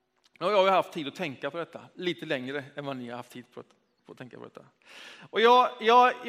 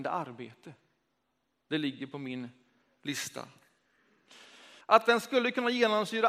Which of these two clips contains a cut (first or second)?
second